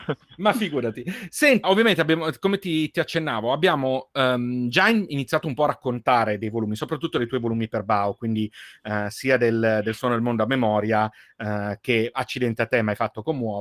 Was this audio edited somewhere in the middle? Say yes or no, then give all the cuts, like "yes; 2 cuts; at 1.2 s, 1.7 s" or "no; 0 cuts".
yes; 1 cut; at 1.6 s